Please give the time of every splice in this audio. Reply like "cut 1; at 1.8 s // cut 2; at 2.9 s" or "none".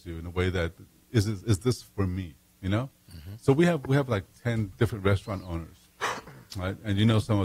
none

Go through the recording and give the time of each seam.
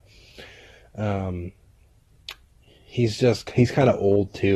none

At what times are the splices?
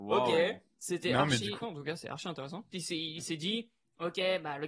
cut 1; at 1.6 s // cut 2; at 2.7 s

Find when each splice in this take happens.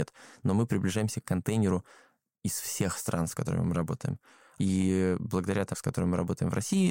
cut 1; at 4.6 s // cut 2; at 5.7 s

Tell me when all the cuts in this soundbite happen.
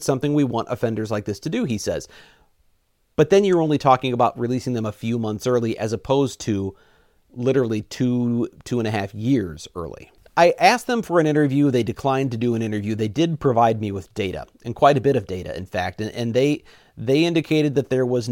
cut 1; at 10.3 s

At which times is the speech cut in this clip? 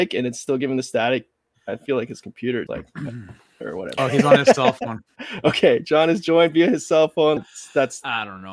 cut 1; at 2.7 s // cut 2; at 4.0 s // cut 3; at 7.4 s

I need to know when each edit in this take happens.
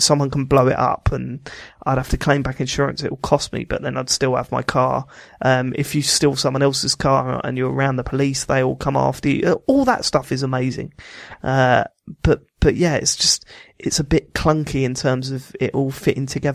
none

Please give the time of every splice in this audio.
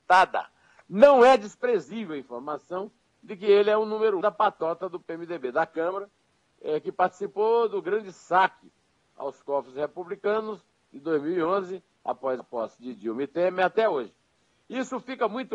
cut 1; at 4.2 s // cut 2; at 12.4 s

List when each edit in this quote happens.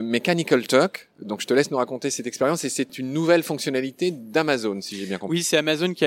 none

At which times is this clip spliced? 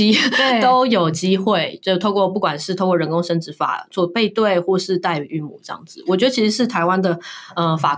none

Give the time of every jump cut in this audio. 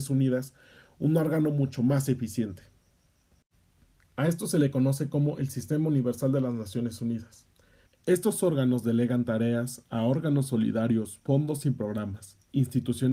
cut 1; at 7.9 s

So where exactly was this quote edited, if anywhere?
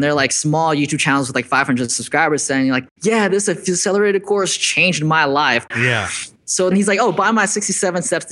cut 1; at 5.7 s // cut 2; at 6.7 s

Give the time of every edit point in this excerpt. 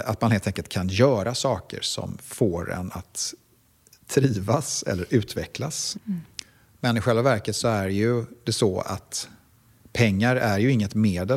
cut 1; at 5.9 s

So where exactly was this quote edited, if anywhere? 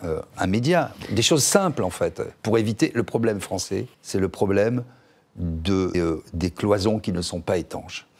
cut 1; at 3.9 s // cut 2; at 5.9 s

